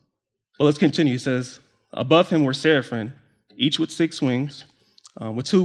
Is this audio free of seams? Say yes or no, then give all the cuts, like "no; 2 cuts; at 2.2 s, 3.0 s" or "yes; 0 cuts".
yes; 0 cuts